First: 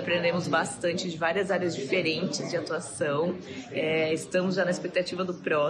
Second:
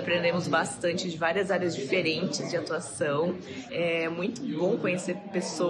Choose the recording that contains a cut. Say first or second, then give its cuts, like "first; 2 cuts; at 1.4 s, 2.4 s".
second; 1 cut; at 3.7 s